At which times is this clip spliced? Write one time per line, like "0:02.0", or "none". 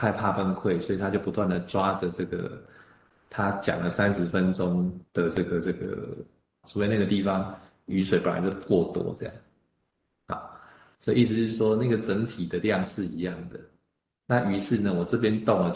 0:06.6
0:10.9